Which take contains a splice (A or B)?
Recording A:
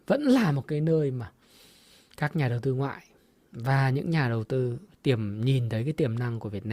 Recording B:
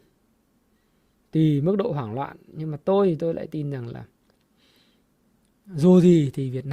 A